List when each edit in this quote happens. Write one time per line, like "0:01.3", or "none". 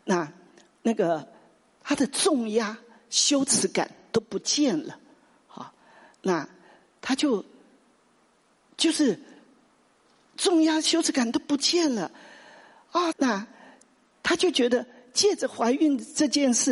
0:13.1